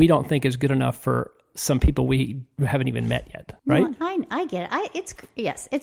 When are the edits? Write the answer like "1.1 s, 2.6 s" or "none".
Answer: 3.6 s